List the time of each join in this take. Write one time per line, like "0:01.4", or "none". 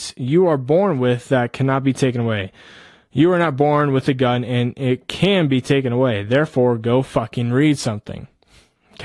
none